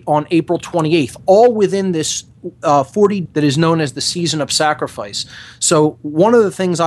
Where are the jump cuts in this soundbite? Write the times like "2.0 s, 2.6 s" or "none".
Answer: 3.3 s